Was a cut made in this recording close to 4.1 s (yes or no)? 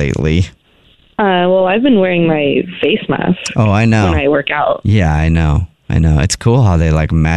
no